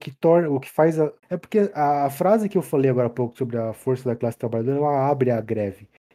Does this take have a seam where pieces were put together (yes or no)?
yes